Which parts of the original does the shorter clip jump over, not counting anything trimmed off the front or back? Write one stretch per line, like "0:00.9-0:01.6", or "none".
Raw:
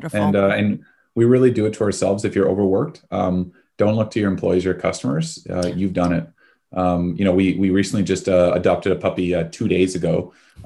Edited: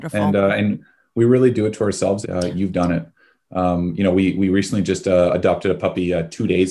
0:02.2-0:05.4